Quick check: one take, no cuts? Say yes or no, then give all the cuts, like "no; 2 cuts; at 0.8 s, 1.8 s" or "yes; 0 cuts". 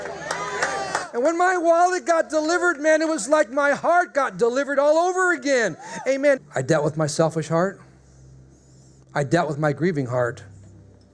no; 1 cut; at 6.4 s